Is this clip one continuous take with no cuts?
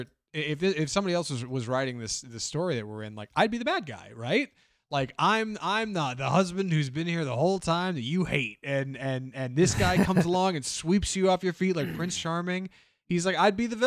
yes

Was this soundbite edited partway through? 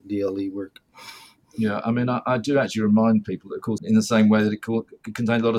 yes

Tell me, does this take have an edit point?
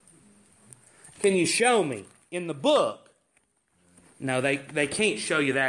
yes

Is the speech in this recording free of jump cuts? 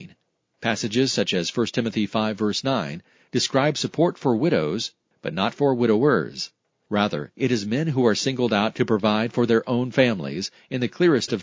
yes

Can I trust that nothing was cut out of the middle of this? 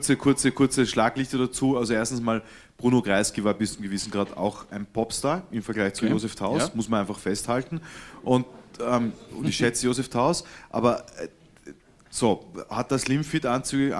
yes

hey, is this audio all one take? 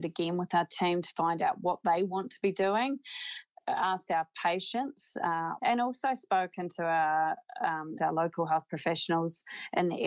no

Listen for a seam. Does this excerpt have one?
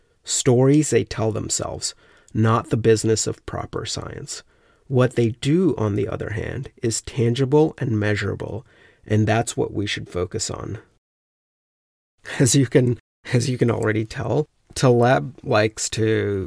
no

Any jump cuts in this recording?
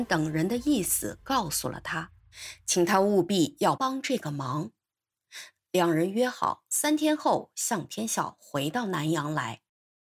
yes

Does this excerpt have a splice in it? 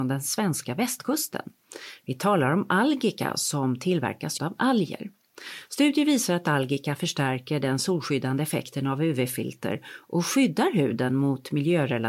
yes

